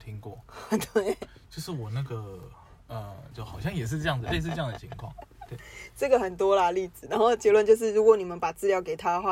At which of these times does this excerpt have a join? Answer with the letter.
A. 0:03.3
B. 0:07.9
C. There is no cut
A